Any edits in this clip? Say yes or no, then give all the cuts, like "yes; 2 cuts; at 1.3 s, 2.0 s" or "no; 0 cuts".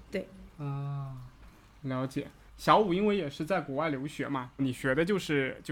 yes; 2 cuts; at 2.5 s, 4.6 s